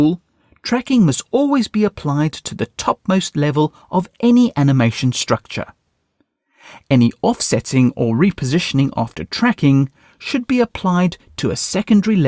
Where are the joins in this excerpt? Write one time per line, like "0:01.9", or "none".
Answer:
none